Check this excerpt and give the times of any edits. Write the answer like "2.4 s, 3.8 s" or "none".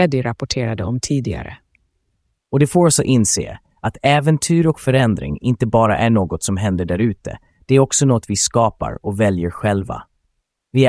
2.4 s